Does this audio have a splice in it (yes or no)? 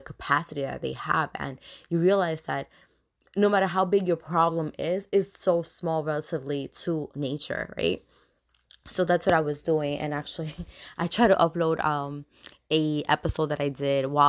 no